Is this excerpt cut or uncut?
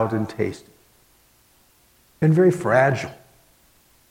cut